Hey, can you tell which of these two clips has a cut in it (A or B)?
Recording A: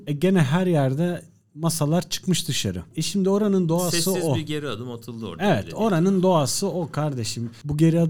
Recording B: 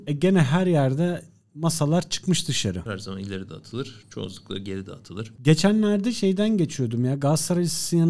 B